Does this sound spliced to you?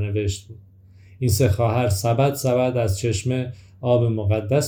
no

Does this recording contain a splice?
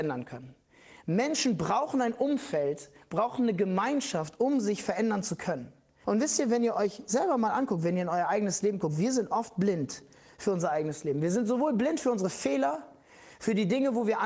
yes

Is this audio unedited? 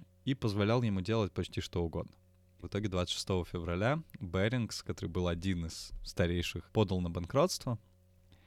no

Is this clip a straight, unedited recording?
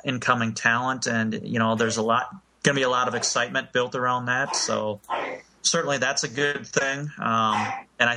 yes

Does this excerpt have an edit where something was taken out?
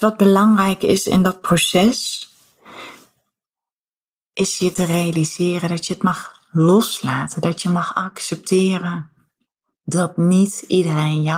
no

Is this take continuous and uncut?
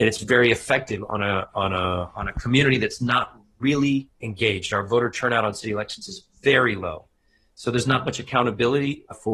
yes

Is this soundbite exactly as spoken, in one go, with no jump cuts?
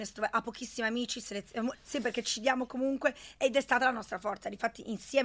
no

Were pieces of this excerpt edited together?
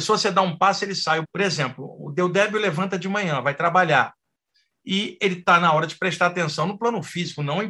yes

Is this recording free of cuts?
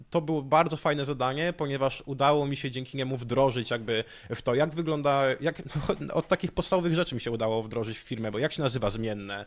yes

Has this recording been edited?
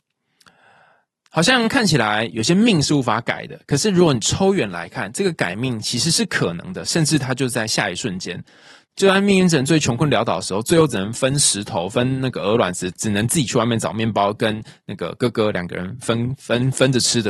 yes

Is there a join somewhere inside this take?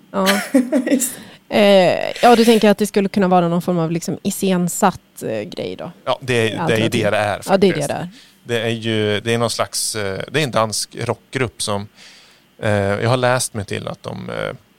no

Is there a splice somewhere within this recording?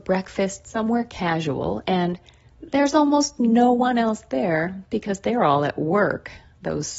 no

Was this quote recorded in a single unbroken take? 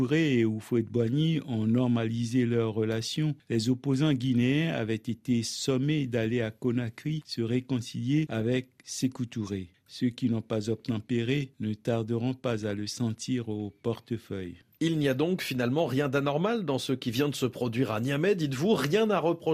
yes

